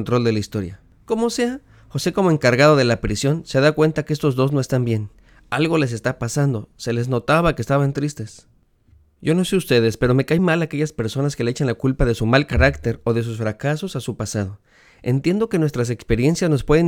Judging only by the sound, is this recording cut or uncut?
cut